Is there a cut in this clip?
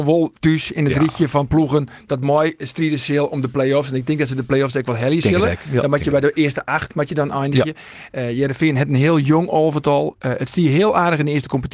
no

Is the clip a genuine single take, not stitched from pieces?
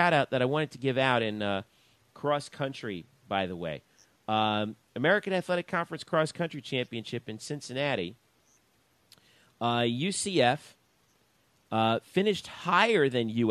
yes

